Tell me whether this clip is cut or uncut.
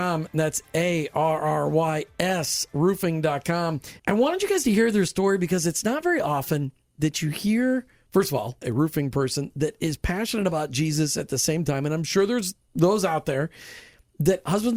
cut